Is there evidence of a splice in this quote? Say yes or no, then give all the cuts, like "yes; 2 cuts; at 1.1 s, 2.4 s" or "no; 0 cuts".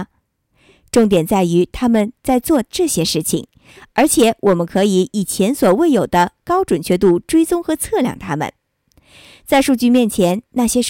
no; 0 cuts